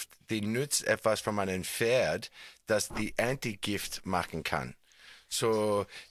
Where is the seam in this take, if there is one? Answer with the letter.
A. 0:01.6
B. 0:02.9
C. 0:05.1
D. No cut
B